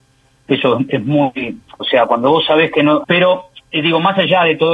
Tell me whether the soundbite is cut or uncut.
cut